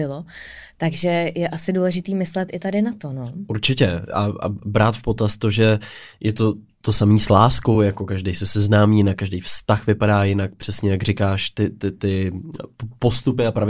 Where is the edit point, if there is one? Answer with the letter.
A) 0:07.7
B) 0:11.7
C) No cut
C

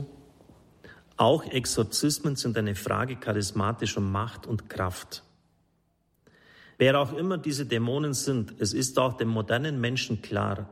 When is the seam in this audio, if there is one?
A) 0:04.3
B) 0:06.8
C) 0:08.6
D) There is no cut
B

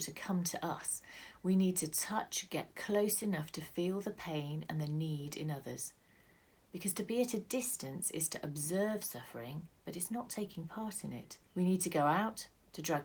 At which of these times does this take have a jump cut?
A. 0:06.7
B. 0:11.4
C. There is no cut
B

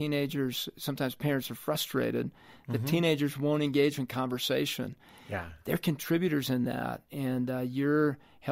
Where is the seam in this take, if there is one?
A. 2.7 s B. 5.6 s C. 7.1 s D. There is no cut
D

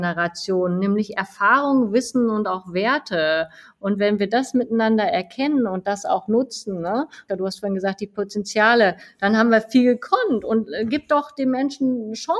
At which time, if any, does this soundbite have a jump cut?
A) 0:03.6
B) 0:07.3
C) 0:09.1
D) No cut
B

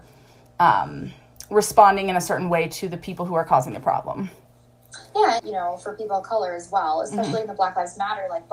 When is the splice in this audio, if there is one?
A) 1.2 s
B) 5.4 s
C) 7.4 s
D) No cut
B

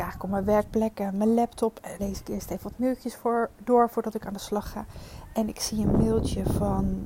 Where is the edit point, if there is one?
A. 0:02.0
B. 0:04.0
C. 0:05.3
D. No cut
A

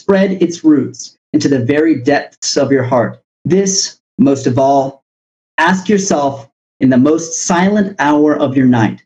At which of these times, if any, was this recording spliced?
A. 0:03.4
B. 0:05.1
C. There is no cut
A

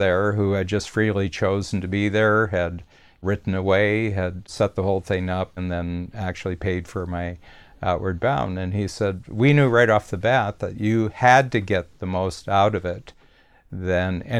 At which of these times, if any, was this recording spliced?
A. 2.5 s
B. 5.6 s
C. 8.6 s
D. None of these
B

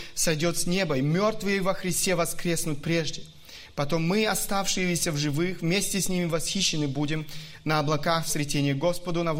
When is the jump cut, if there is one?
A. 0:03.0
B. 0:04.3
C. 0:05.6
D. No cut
D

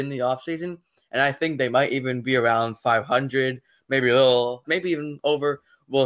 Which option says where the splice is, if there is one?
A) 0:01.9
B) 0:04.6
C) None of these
B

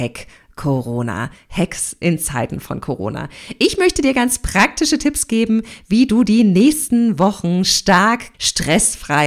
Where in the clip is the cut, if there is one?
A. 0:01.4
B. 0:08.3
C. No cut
B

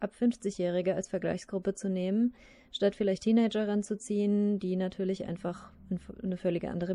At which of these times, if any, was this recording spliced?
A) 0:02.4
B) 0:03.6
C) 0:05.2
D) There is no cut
D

